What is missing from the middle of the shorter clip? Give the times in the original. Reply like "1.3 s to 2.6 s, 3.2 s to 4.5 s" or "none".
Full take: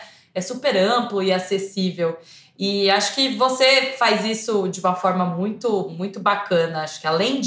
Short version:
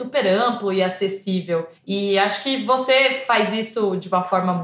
2.3 s to 2.5 s